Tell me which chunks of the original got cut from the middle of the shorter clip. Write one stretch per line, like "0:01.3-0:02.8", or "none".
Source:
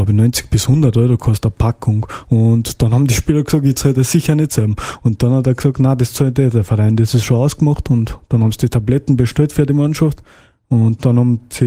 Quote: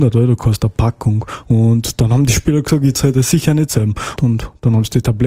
0:05.0-0:07.8